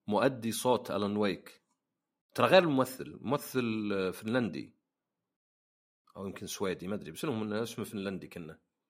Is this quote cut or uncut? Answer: uncut